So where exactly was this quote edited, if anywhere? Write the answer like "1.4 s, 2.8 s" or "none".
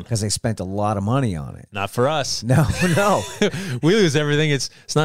none